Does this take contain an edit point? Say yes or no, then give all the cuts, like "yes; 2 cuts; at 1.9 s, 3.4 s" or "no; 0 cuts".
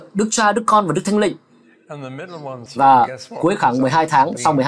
yes; 1 cut; at 2.7 s